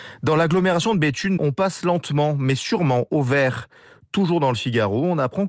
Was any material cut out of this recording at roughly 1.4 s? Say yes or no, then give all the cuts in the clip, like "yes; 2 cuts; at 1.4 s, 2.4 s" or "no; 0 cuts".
yes; 1 cut; at 1.4 s